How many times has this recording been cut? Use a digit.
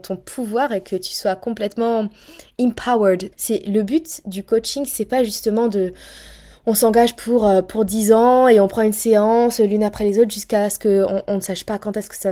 1